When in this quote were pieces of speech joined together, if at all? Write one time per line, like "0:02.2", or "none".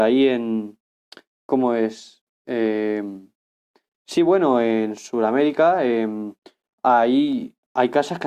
none